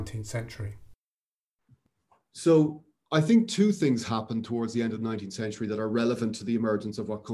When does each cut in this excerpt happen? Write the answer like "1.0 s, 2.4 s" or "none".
none